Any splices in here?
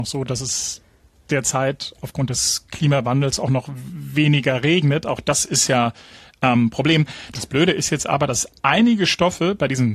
yes; 1 cut; at 7.3 s

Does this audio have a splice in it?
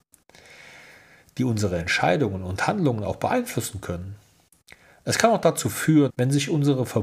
yes; 1 cut; at 6.1 s

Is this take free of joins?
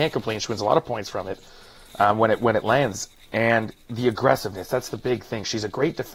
yes; 0 cuts

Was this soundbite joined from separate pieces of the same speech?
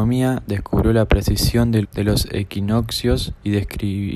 yes; 1 cut; at 1.8 s

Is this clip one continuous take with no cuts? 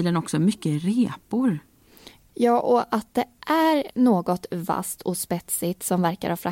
no; 1 cut; at 2.2 s

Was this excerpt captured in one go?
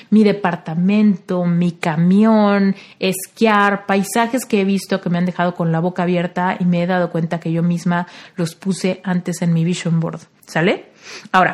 no; 1 cut; at 10.4 s

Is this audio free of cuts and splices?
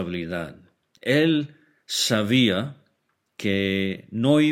yes; 0 cuts

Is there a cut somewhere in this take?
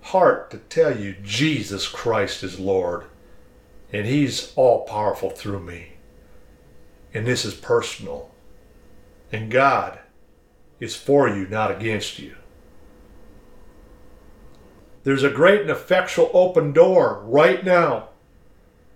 yes; 1 cut; at 14.9 s

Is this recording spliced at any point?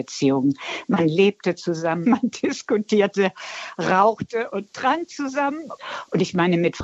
yes; 1 cut; at 2.0 s

